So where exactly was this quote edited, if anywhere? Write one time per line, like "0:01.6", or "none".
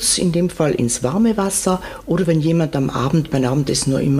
none